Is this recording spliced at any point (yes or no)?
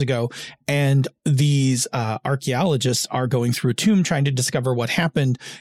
no